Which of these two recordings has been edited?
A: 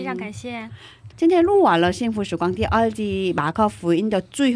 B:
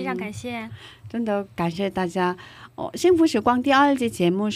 A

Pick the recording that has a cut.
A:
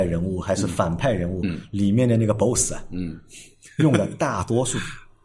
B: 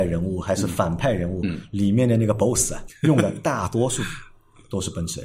B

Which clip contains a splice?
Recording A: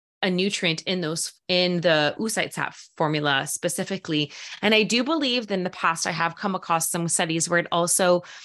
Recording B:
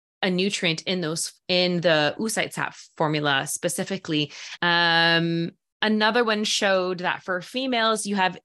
B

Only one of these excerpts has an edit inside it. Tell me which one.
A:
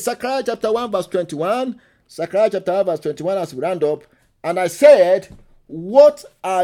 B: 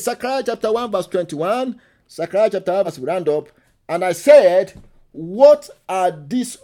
B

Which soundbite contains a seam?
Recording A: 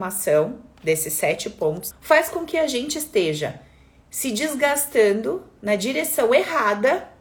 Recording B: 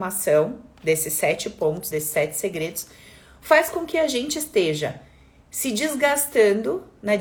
A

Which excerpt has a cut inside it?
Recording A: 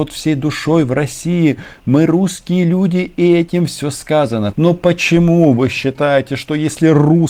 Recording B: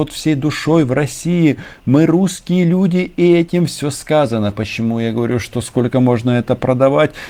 A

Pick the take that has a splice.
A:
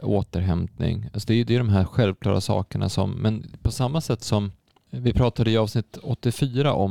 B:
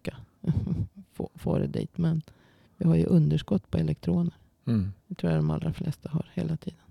B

